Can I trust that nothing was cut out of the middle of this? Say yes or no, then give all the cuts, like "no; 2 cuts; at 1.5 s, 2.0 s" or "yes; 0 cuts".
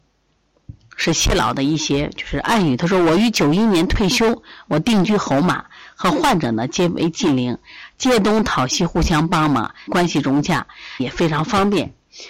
no; 2 cuts; at 9.9 s, 11.0 s